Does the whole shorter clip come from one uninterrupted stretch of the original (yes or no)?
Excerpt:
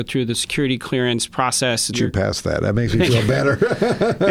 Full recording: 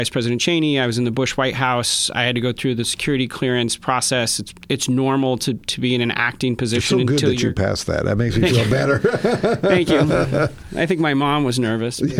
no